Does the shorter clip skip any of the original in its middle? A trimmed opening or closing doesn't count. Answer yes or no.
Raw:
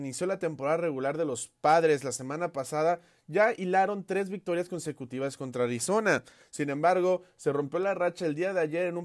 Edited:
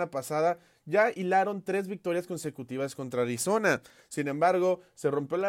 no